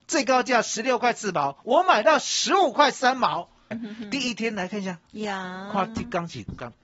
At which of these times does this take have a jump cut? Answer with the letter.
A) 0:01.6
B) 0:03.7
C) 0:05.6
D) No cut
B